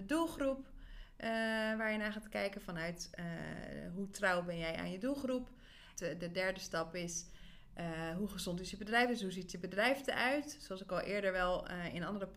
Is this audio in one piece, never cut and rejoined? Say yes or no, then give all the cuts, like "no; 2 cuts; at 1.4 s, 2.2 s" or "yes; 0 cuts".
no; 1 cut; at 5.9 s